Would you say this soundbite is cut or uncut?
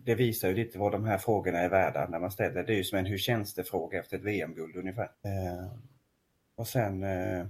cut